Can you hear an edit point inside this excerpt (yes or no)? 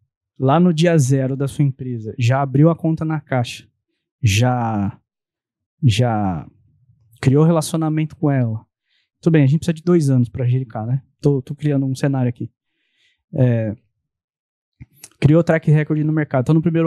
yes